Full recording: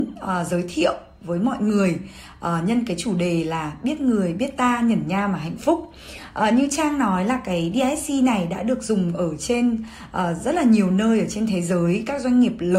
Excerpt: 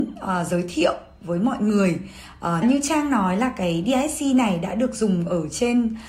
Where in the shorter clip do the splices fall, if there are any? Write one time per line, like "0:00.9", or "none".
0:02.6